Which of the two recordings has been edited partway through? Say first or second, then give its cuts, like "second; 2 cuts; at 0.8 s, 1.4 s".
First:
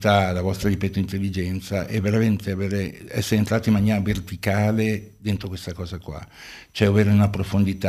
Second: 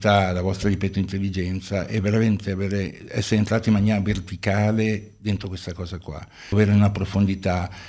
second; 1 cut; at 6.5 s